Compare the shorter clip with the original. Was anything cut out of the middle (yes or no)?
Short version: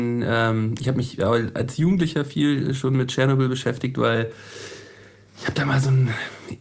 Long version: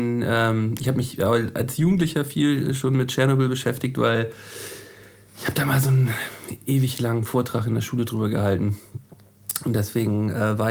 no